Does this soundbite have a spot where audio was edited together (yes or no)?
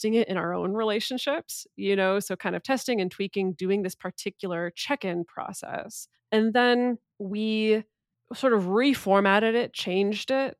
no